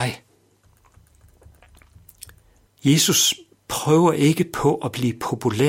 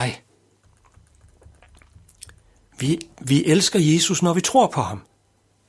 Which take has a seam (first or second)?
first